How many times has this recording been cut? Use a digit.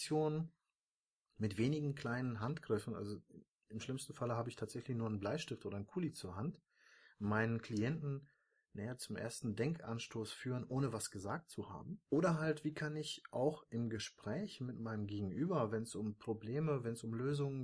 1